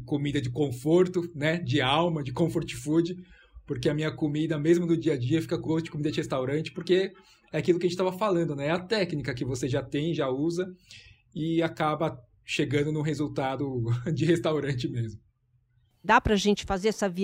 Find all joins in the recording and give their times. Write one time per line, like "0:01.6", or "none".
0:05.6
0:16.0